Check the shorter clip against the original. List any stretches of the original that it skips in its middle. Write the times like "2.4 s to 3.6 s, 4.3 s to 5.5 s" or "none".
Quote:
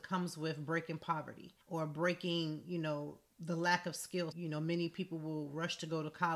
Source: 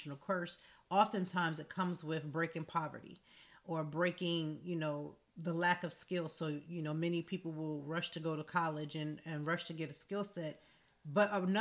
3.3 s to 3.6 s, 6.3 s to 6.6 s